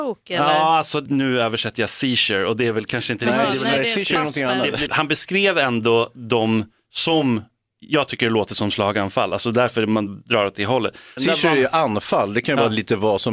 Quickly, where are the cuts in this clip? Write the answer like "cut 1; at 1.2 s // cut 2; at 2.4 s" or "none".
cut 1; at 4.9 s